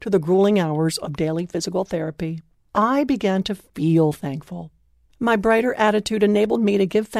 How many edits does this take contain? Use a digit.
1